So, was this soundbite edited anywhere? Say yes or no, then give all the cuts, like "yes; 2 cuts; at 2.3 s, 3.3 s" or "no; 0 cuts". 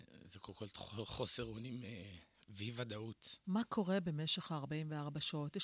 yes; 1 cut; at 3.4 s